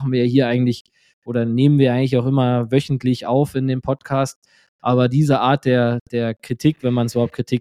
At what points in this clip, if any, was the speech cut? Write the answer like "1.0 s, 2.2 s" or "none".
none